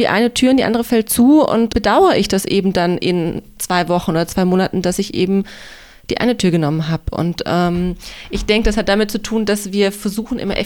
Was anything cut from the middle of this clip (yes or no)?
yes